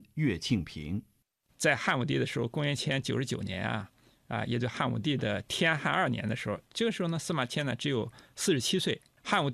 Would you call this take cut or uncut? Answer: uncut